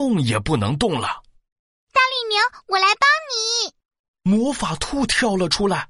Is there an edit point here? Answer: no; 0 cuts

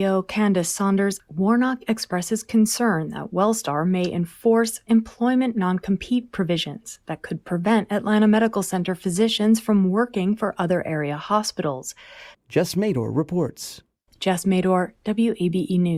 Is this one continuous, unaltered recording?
no; 2 cuts; at 12.3 s, 14.1 s

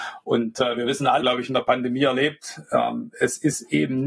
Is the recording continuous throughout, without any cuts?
no; 1 cut; at 1.2 s

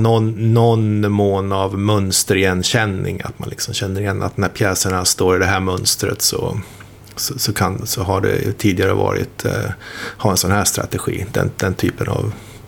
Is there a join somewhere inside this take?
yes; 2 cuts; at 7.8 s, 10.2 s

